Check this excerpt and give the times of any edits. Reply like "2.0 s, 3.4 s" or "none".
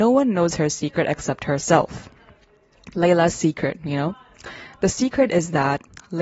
none